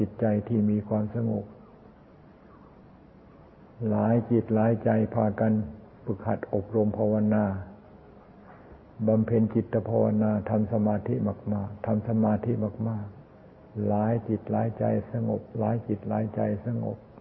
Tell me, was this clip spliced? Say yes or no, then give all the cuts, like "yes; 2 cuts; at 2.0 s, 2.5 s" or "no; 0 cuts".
yes; 1 cut; at 13.2 s